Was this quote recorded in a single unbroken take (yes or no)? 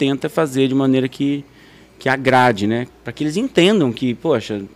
no